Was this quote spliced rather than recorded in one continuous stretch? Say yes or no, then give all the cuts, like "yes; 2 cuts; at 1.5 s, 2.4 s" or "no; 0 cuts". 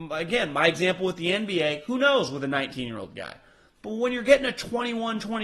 no; 0 cuts